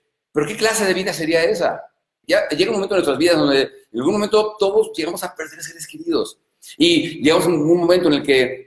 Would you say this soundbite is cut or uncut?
cut